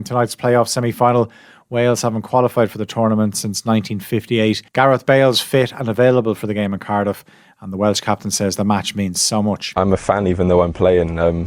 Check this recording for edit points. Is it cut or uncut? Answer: cut